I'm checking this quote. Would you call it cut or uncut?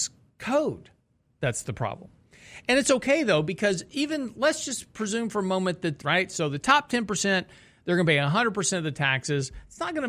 cut